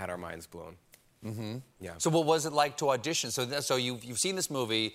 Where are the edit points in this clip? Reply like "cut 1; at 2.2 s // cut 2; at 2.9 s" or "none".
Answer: none